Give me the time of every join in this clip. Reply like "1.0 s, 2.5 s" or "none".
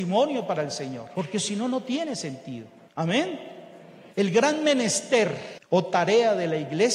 4.1 s